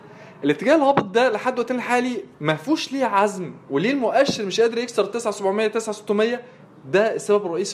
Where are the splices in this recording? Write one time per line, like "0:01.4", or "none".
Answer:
0:02.3